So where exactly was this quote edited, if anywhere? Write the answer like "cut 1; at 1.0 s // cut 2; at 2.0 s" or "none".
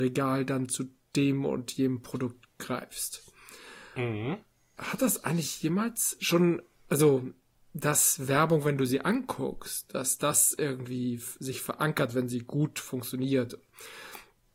none

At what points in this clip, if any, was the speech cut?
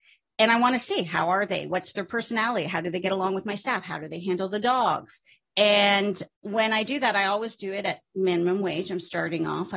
none

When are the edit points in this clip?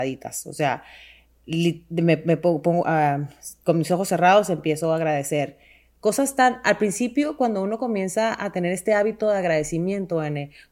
none

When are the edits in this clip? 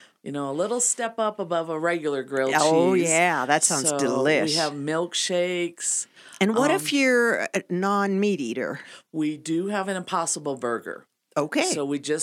none

